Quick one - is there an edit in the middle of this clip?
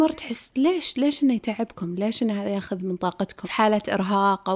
yes; 1 cut; at 3.4 s

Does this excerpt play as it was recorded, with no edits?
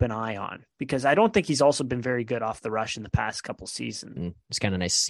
no; 1 cut; at 4.2 s

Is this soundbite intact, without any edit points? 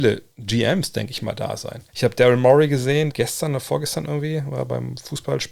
no; 2 cuts; at 1.9 s, 3.1 s

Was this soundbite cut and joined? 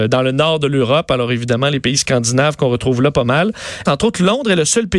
yes; 1 cut; at 3.9 s

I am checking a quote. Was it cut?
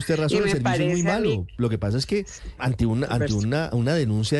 yes; 1 cut; at 2.6 s

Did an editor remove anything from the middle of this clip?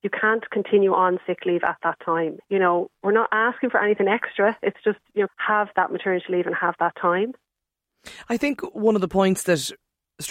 yes; 2 cuts; at 2.4 s, 5.3 s

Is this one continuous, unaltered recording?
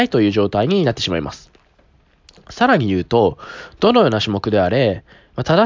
yes; 0 cuts

